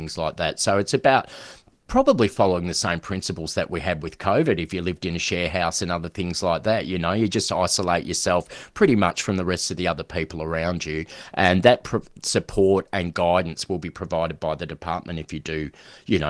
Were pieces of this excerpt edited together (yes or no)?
no